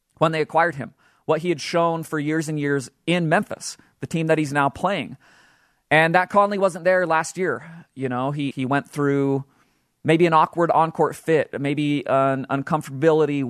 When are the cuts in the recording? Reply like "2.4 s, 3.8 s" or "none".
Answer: 8.5 s